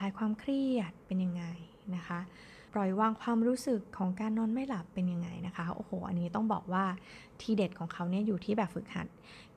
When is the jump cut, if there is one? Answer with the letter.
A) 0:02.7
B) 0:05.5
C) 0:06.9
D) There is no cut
A